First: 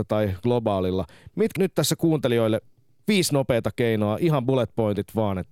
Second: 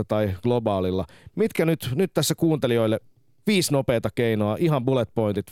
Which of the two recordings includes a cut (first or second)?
first